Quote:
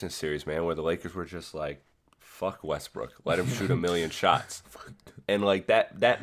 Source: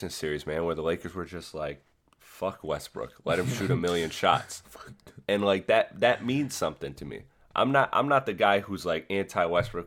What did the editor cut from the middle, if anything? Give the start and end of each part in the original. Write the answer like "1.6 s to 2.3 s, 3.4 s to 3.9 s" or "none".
none